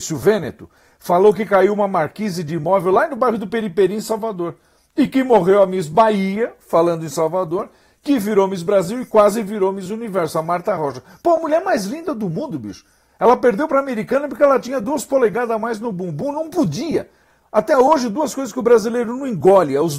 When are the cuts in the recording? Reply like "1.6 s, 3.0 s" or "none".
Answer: none